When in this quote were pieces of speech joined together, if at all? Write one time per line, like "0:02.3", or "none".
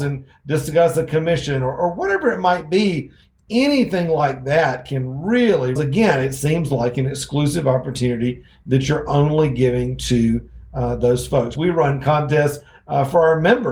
0:05.8
0:11.6